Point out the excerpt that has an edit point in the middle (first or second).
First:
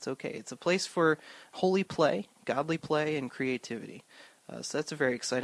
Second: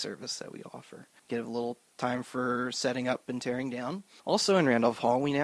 second